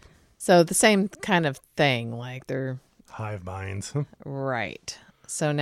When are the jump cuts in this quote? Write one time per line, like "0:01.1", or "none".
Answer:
0:03.0